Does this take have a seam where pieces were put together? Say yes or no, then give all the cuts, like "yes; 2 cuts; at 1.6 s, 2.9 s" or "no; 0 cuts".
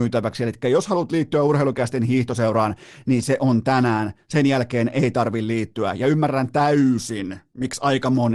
no; 0 cuts